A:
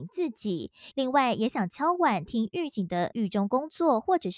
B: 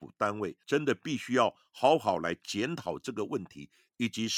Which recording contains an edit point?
A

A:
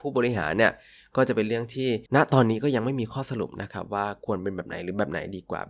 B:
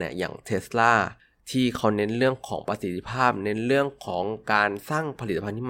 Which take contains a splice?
A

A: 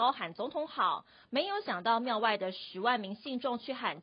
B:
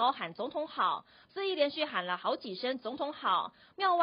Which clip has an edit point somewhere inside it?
B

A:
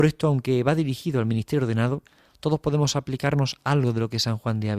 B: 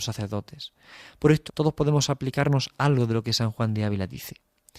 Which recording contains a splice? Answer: B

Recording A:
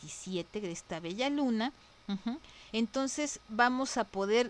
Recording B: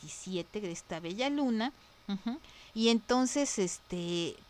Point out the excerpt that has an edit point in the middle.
B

